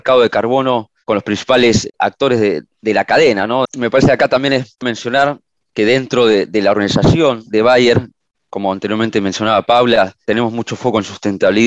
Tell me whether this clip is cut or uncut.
cut